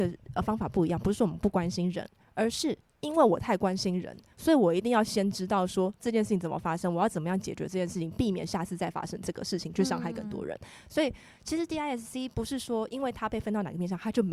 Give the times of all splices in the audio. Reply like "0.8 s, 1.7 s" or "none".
none